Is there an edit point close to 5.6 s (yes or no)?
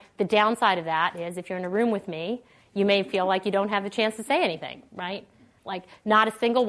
yes